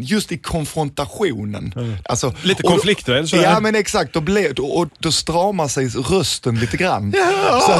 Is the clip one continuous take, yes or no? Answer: no